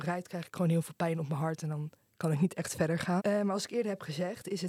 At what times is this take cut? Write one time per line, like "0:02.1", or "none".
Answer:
0:03.2